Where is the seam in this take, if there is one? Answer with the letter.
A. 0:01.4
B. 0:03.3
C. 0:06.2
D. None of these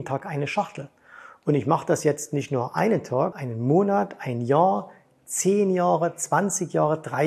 B